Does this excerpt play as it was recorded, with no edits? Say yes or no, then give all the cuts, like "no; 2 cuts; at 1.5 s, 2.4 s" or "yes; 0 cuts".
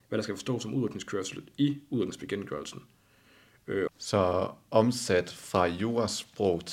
no; 1 cut; at 3.9 s